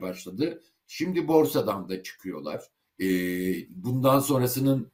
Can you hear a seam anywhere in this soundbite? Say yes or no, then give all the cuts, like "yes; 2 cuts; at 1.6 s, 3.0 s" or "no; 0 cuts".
yes; 1 cut; at 2.8 s